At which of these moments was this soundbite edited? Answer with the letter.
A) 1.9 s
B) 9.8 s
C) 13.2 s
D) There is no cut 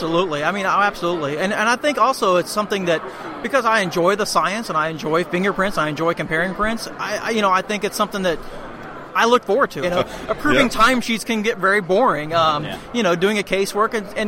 B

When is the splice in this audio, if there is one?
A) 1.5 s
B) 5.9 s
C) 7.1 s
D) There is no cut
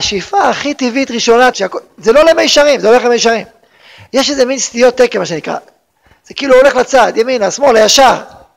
A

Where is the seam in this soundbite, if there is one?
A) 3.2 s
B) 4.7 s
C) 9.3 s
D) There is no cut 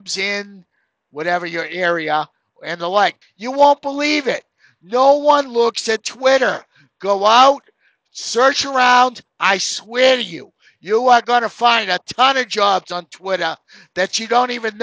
A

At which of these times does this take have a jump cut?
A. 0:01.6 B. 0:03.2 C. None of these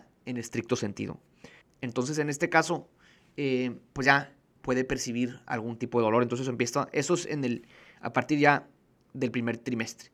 A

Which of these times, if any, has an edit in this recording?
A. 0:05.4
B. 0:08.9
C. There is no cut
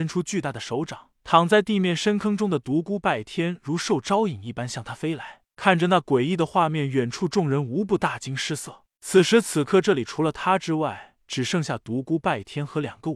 B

